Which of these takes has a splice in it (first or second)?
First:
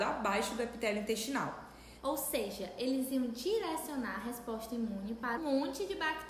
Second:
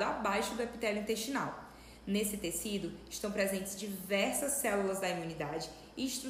first